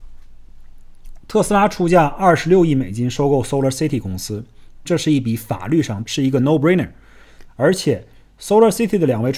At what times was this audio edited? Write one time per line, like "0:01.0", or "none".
0:04.8
0:06.0
0:07.5